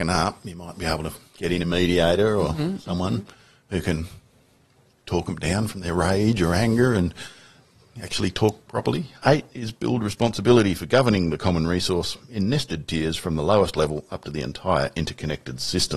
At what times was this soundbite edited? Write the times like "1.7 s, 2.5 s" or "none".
5.0 s